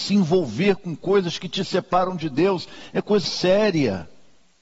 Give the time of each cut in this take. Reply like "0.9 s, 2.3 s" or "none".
3.2 s